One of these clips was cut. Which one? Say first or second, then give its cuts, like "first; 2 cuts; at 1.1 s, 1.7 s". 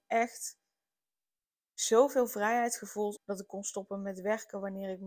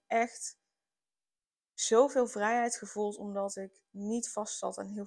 first; 1 cut; at 3.2 s